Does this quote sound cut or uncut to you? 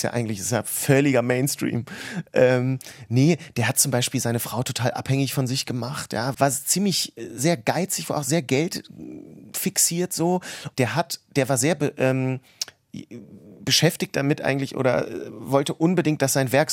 cut